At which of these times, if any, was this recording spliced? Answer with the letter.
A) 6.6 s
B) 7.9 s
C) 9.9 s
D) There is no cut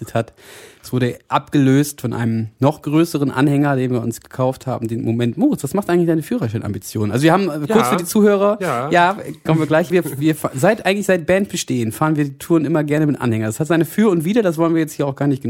C